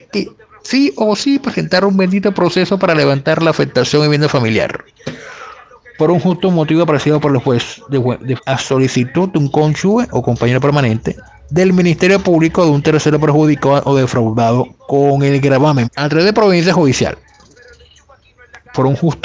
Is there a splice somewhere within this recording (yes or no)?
yes